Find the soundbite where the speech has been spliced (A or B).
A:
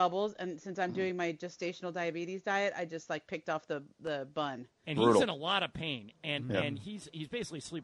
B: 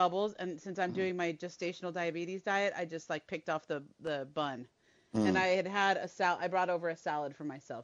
A